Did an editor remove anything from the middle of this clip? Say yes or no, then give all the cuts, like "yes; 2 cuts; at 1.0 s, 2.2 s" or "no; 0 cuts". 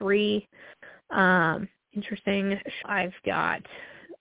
yes; 1 cut; at 2.8 s